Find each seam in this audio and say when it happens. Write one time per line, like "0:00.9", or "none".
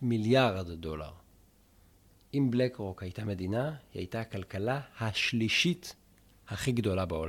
none